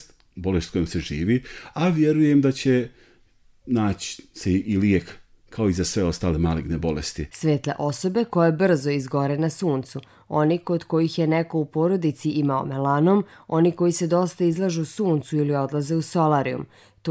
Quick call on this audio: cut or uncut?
uncut